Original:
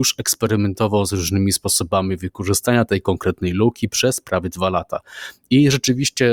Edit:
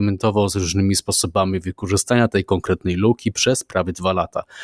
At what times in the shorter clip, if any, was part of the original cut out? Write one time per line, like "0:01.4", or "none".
none